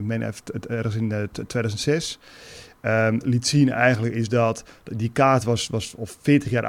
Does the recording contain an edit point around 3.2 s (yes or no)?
yes